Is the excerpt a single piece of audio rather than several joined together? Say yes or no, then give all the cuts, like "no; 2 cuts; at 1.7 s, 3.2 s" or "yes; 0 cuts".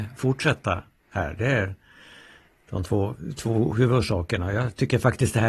yes; 0 cuts